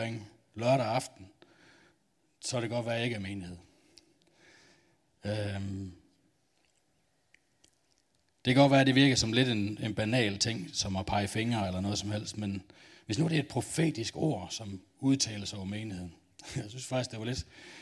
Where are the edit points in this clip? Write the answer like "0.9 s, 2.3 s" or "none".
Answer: none